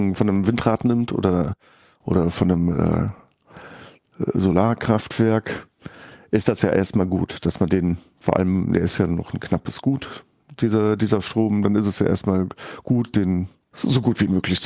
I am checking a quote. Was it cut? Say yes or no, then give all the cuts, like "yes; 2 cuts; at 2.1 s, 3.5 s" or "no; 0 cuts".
no; 0 cuts